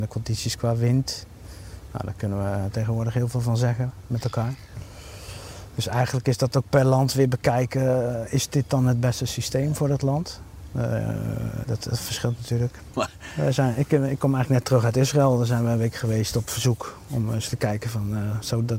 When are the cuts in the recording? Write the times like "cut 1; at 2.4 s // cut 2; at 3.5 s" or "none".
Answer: cut 1; at 11.6 s // cut 2; at 12.9 s